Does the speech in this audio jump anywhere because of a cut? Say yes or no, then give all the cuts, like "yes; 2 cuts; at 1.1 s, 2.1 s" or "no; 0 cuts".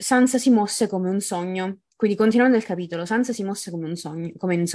no; 0 cuts